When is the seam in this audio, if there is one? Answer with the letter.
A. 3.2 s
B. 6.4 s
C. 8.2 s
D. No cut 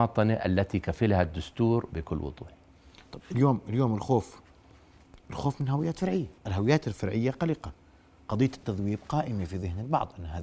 B